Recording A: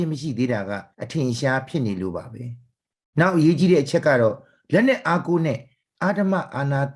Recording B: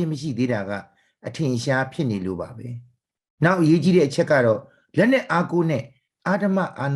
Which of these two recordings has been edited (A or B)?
A